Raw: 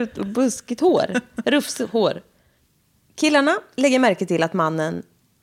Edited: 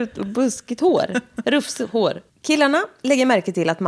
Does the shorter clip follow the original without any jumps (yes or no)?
no